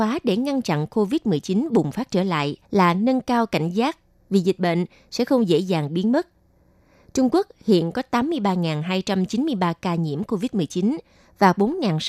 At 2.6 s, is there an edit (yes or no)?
yes